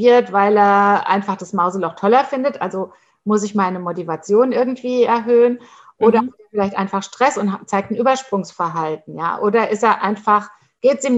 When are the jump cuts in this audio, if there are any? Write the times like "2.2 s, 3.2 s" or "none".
none